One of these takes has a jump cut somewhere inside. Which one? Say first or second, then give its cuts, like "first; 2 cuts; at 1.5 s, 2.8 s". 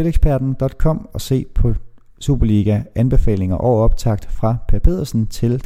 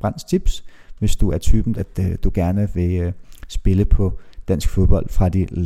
second; 1 cut; at 1.7 s